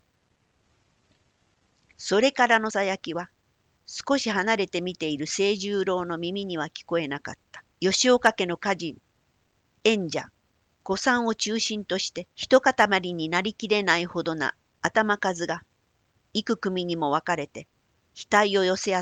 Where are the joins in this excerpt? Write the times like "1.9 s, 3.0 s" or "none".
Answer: 2.7 s, 7.7 s, 12.3 s